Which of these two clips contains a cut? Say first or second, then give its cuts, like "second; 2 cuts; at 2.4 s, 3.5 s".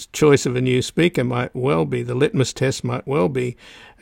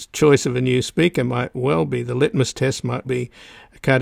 second; 1 cut; at 3.0 s